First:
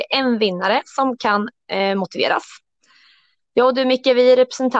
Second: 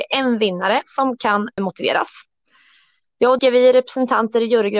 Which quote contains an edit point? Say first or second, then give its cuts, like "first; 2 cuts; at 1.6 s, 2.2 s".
second; 2 cuts; at 1.6 s, 3.4 s